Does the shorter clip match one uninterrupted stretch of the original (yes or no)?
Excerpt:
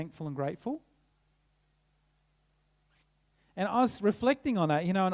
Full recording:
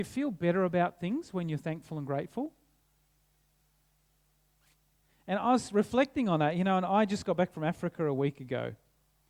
yes